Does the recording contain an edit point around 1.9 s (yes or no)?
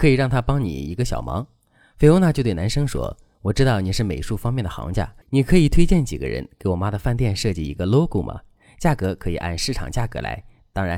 no